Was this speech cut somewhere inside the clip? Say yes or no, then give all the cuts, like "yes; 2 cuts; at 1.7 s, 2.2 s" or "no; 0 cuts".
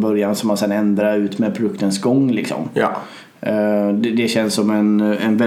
no; 0 cuts